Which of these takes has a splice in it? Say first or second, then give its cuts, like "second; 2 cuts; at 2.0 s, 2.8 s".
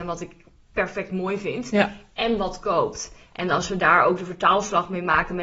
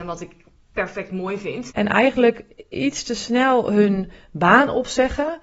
second; 1 cut; at 1.7 s